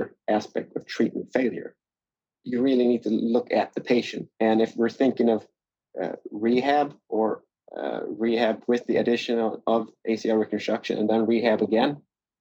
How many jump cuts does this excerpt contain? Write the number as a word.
two